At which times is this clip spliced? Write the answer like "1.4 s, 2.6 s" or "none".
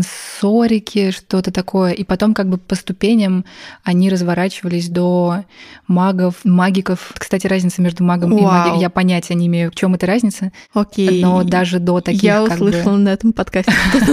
none